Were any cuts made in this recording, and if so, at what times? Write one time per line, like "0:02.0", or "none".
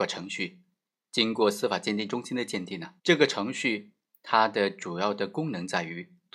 0:03.0